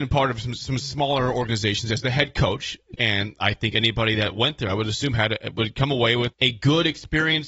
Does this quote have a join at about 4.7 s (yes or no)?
no